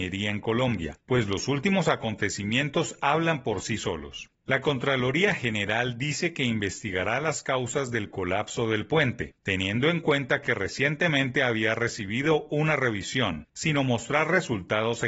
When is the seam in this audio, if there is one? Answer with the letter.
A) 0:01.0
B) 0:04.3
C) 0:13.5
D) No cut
C